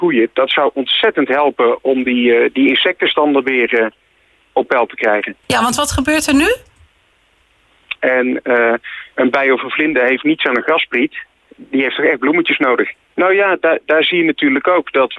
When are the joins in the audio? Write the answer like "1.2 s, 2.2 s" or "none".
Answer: 5.4 s, 8.0 s, 13.1 s